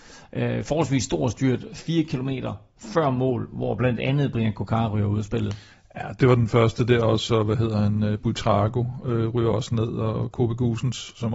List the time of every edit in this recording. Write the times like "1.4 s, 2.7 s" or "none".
6.2 s